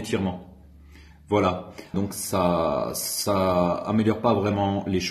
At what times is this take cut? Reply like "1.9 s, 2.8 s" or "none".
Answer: 1.9 s